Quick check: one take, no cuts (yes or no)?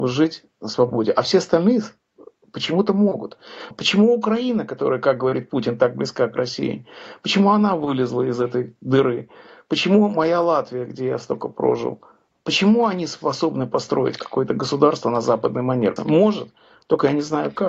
no